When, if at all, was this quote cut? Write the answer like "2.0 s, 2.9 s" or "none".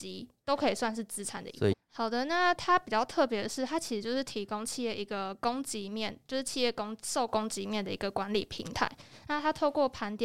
1.7 s